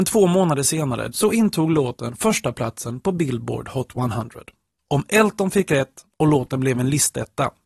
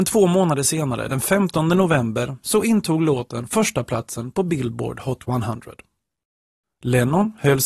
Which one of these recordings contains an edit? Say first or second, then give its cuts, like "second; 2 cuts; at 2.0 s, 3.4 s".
first; 2 cuts; at 1.1 s, 4.8 s